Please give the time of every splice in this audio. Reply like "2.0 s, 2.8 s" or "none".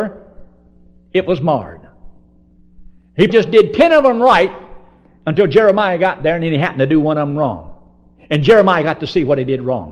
3.3 s